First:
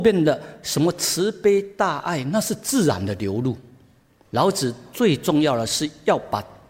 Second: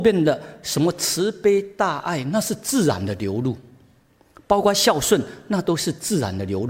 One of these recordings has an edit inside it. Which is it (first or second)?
first